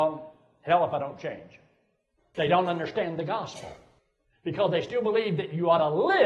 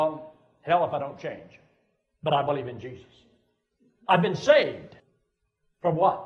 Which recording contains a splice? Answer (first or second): first